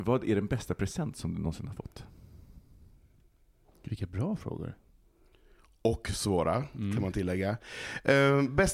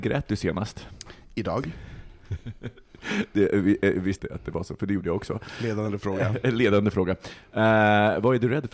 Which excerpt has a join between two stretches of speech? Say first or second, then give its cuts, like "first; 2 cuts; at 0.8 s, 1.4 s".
second; 1 cut; at 4.2 s